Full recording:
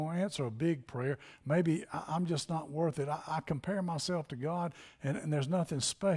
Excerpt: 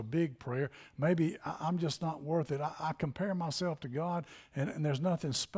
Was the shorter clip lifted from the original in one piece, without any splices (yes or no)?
yes